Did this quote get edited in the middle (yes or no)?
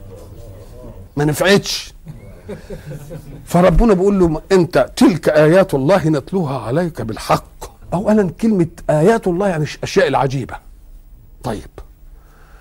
yes